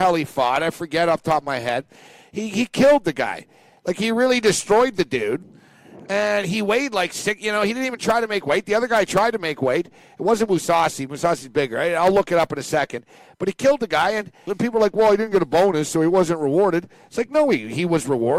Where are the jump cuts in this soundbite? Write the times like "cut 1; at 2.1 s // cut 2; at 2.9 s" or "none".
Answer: cut 1; at 14.5 s